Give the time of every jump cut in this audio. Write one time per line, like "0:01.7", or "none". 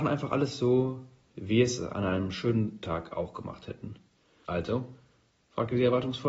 0:04.4